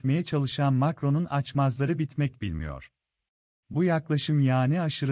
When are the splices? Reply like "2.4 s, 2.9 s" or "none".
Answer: 3.6 s